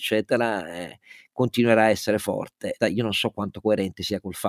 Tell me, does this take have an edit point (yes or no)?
yes